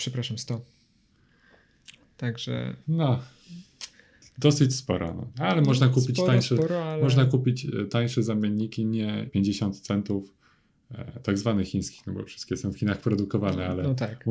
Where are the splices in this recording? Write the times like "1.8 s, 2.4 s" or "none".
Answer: 2.8 s, 5.3 s, 9.3 s